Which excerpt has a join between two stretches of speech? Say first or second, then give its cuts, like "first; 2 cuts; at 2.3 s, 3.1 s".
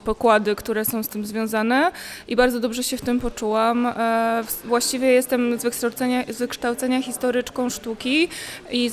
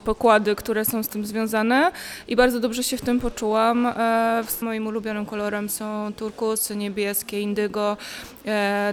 second; 1 cut; at 4.6 s